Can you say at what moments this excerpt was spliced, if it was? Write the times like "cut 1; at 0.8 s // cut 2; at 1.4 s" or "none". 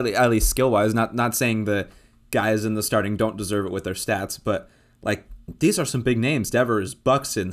none

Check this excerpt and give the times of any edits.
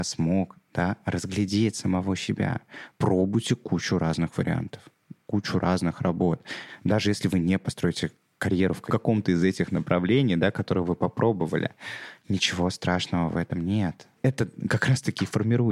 cut 1; at 2.9 s // cut 2; at 14.2 s

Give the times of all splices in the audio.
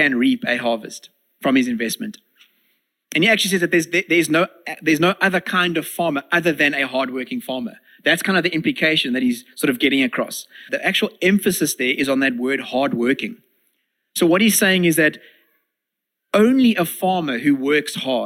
cut 1; at 10.7 s

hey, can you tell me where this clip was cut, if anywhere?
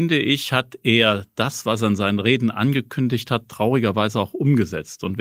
none

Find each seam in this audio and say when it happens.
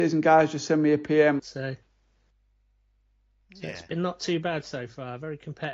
cut 1; at 1.4 s

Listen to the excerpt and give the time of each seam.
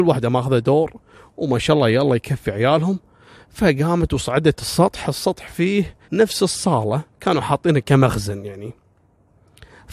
cut 1; at 6.0 s

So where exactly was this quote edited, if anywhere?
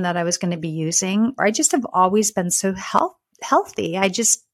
cut 1; at 1.4 s

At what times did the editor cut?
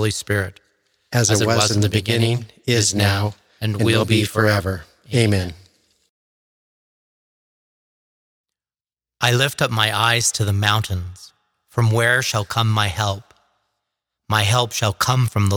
none

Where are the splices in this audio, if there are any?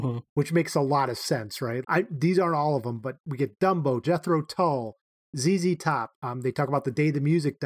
cut 1; at 1.8 s // cut 2; at 4.0 s // cut 3; at 6.1 s

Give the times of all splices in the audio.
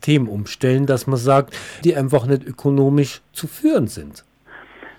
cut 1; at 1.8 s

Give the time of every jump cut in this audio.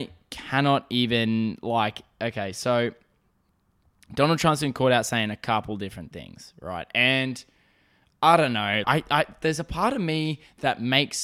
cut 1; at 8.8 s

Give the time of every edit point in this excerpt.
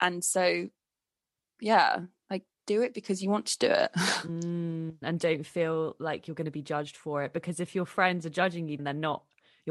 cut 1; at 5.0 s // cut 2; at 8.8 s

